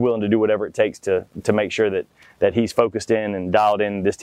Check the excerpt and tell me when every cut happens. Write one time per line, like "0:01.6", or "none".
none

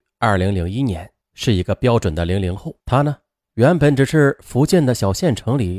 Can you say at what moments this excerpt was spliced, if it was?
0:01.2
0:02.8

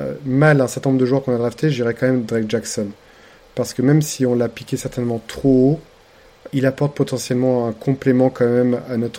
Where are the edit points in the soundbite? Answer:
0:06.5

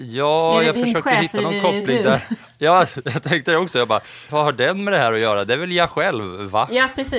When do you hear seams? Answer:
0:04.3

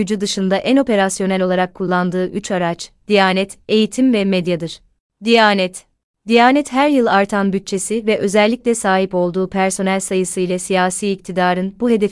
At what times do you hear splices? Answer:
none

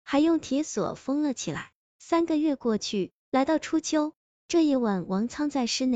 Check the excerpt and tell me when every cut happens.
none

